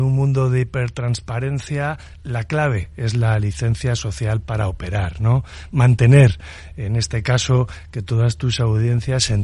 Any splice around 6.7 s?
no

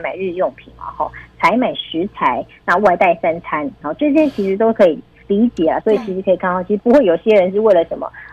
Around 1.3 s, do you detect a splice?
no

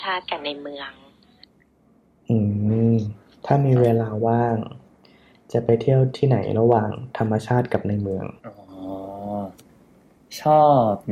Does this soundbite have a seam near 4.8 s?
no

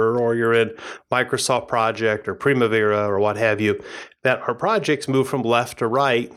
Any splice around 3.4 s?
no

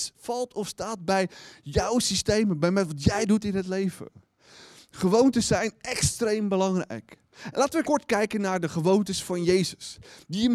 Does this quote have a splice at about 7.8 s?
yes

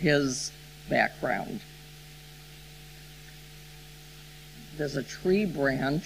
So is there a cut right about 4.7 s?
yes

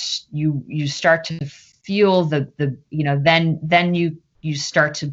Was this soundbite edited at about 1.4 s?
no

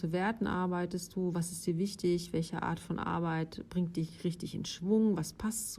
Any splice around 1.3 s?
no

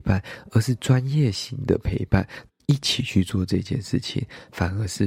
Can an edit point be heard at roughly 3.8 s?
no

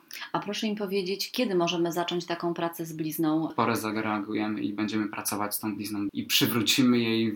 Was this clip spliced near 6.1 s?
yes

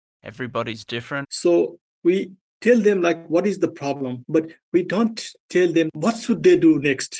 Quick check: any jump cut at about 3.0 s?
no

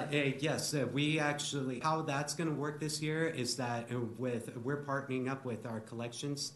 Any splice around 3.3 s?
no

